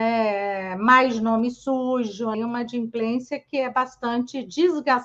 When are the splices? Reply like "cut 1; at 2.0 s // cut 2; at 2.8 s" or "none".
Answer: cut 1; at 2.3 s